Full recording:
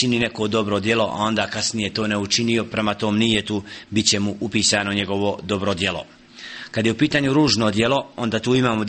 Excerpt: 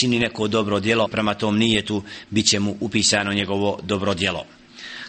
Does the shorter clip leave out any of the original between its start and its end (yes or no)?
yes